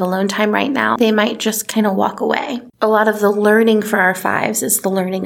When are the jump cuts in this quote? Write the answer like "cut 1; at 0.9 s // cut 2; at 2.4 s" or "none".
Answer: cut 1; at 1.0 s // cut 2; at 2.7 s